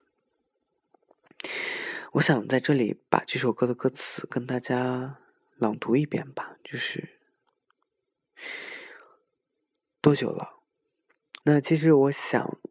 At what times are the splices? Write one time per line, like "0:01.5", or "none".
0:11.4